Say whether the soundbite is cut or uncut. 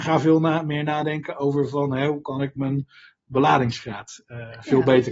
uncut